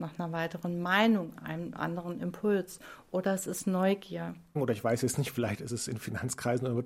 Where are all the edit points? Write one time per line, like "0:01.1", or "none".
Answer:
0:04.6